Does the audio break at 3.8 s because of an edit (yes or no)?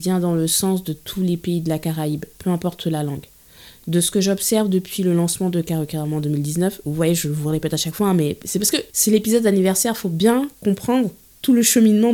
no